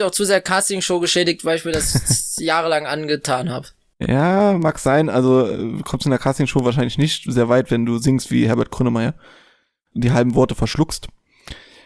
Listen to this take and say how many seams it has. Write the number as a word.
zero